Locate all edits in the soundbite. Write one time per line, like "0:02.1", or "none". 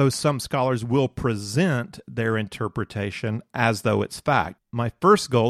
0:04.6